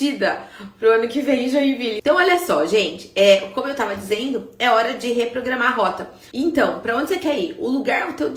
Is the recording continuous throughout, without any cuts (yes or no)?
no